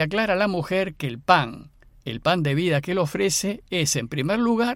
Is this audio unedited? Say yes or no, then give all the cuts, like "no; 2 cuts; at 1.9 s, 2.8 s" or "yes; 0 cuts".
yes; 0 cuts